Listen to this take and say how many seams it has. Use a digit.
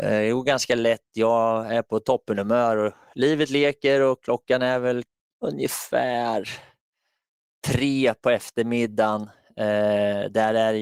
0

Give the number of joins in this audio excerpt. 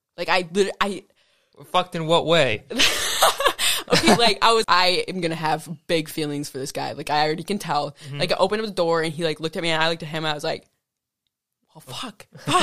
1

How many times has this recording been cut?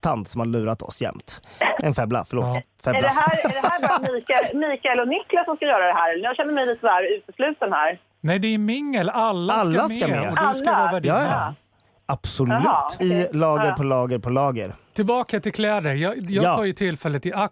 2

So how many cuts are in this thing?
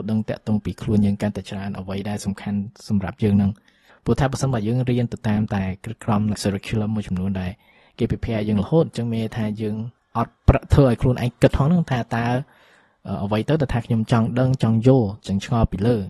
1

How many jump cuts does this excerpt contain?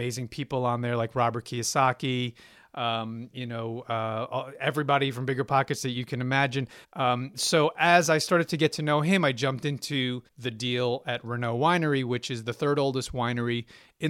2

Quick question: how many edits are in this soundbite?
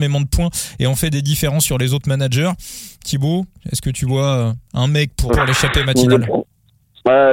1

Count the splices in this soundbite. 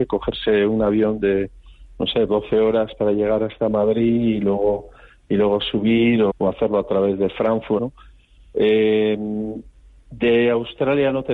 3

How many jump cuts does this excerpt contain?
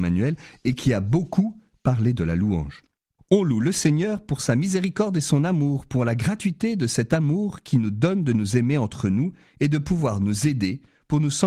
1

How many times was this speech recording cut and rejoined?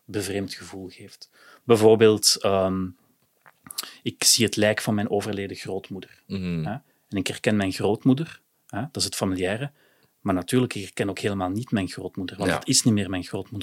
0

